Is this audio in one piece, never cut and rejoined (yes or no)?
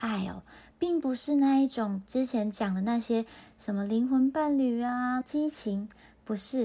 no